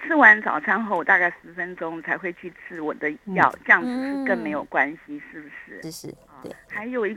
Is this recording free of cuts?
no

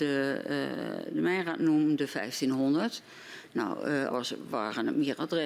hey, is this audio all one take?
no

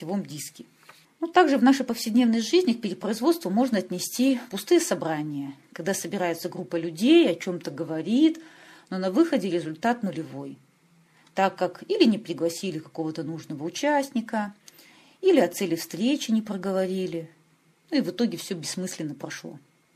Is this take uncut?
no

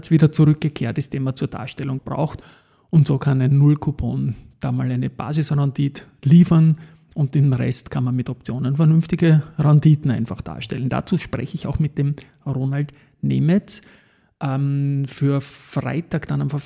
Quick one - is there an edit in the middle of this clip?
yes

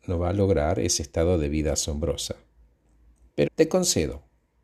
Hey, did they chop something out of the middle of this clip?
yes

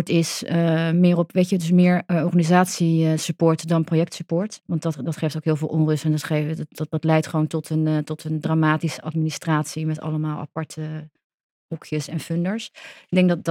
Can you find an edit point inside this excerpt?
no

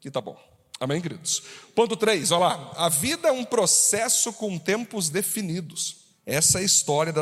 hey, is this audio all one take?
yes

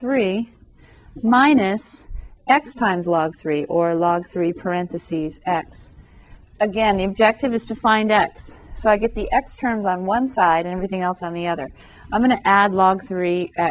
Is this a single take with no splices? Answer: yes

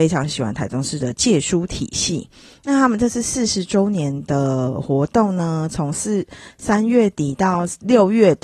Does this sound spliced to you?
no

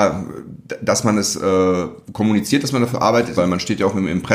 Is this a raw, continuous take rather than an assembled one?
no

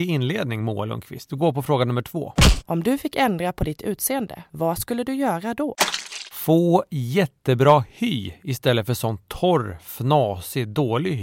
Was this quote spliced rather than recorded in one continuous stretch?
no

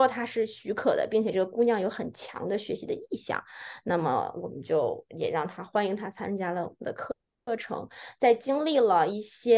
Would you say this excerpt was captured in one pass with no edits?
yes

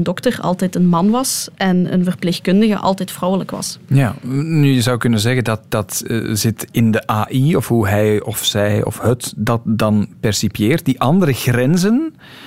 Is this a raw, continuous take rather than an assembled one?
yes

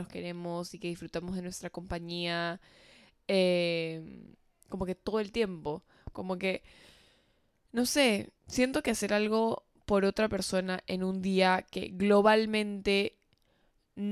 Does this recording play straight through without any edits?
no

